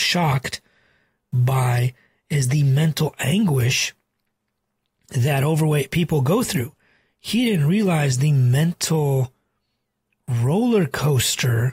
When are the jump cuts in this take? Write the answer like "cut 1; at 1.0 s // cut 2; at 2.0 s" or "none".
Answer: none